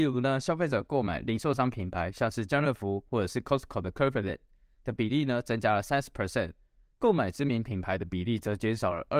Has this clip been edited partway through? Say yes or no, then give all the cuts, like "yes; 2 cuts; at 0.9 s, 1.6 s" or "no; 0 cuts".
no; 0 cuts